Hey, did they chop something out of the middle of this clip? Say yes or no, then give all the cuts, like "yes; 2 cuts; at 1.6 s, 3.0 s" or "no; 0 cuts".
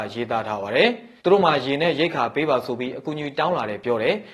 yes; 1 cut; at 1.2 s